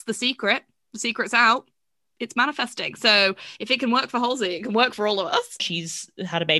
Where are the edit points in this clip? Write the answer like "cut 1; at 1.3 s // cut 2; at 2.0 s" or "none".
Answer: cut 1; at 5.6 s